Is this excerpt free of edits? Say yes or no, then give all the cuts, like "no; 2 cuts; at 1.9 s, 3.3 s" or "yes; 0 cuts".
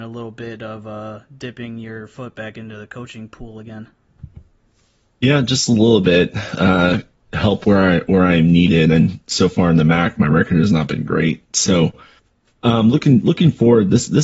yes; 0 cuts